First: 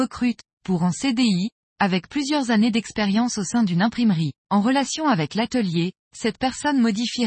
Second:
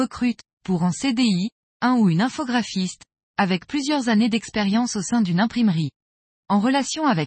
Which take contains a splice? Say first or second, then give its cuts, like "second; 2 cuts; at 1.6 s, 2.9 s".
first; 3 cuts; at 1.7 s, 4.4 s, 6.0 s